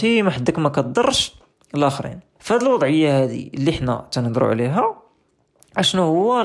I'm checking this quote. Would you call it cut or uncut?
cut